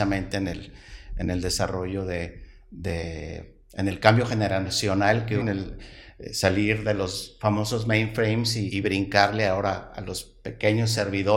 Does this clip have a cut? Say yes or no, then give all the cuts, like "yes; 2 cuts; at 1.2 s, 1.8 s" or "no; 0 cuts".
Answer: yes; 2 cuts; at 5.4 s, 8.7 s